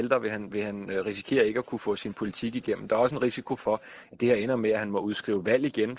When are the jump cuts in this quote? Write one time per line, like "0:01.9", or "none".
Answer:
none